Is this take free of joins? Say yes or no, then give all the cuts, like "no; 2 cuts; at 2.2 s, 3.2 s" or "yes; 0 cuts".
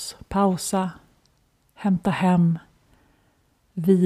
yes; 0 cuts